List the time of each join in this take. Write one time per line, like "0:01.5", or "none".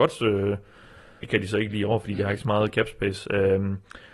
0:01.2